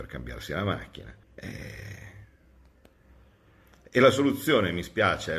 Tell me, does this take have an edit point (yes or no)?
yes